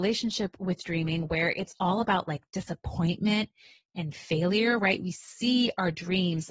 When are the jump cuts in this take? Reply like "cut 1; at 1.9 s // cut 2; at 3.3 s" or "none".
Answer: none